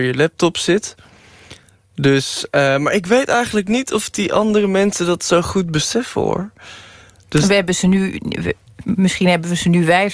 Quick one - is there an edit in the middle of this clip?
no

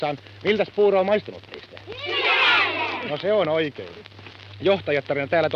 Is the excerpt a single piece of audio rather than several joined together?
yes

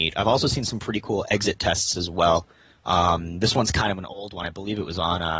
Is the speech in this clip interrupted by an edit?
no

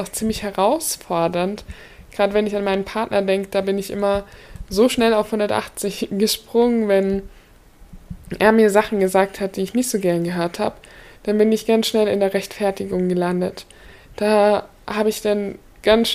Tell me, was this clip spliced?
no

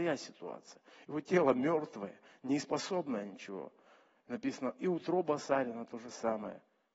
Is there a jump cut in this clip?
no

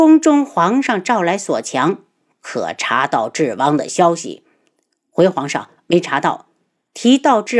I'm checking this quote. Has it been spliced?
no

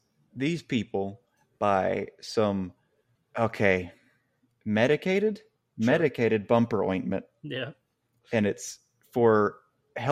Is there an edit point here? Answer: no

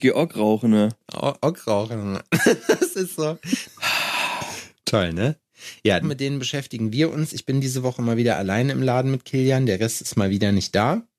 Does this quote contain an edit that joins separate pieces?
yes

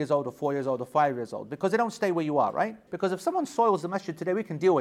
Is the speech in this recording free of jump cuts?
no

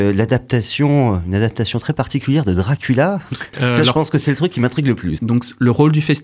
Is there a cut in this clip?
yes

